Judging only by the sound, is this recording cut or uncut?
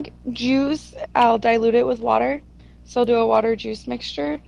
cut